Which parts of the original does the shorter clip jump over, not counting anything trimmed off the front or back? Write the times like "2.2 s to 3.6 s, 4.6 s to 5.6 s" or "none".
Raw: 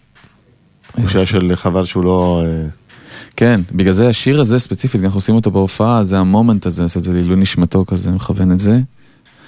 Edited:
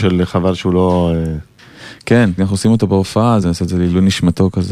3.7 s to 5.0 s, 6.1 s to 6.8 s